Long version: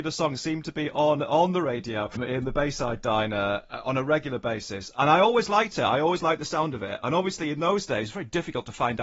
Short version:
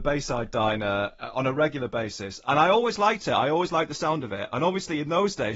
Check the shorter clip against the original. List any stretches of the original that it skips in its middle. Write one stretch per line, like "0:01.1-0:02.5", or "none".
none

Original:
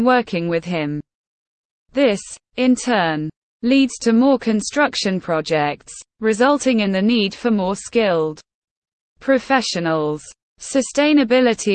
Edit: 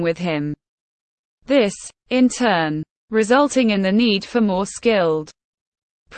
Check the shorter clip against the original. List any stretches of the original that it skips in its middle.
0:03.5-0:06.1

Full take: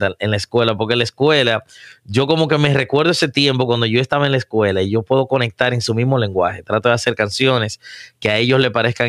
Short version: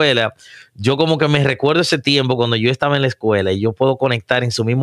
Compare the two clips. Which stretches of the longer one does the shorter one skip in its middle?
none

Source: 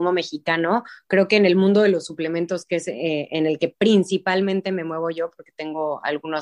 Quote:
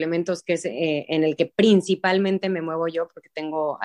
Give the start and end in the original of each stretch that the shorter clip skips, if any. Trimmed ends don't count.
none

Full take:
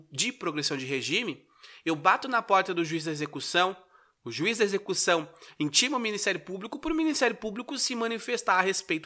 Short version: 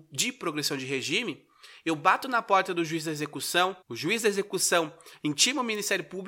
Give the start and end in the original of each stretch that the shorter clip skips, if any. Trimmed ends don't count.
0:03.8-0:04.2

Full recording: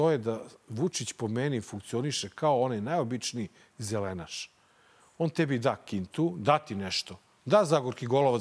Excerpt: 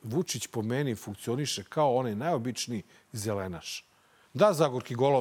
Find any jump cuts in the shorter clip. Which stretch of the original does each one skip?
0:04.9-0:07.4

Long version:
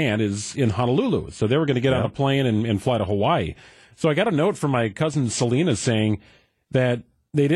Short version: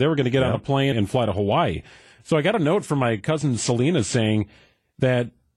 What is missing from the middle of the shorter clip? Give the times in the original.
0:02.4-0:02.6

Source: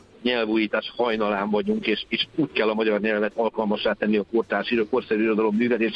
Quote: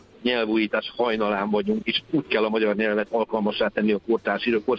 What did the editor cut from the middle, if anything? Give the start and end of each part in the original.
0:01.8-0:02.1

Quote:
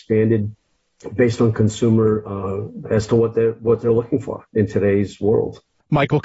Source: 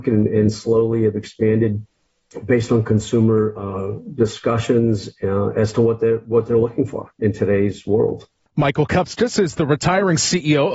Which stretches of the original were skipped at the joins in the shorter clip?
0:04.2-0:05.5

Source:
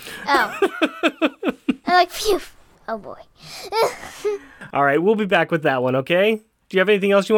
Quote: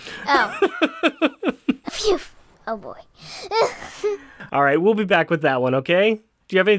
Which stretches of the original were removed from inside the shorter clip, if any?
0:01.9-0:02.1

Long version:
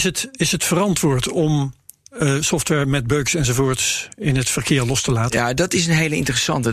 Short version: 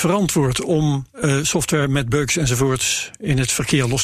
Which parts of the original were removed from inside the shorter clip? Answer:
0:01.8-0:02.1

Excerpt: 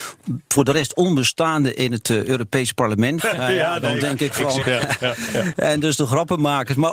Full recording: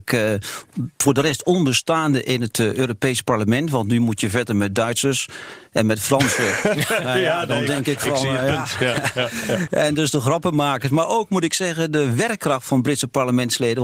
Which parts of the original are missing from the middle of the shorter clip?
0:03.7-0:06.9
0:08.3-0:08.8

